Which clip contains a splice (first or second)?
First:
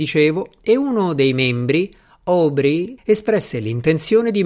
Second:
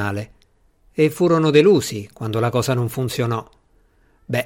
first